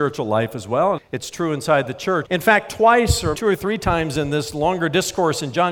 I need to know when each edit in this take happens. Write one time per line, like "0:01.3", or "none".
0:01.0
0:02.2
0:03.3